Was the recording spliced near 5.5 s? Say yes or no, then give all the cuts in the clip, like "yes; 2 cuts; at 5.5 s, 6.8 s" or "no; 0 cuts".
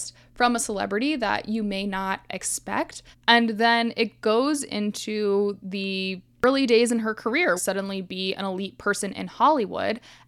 no; 2 cuts; at 3.1 s, 7.6 s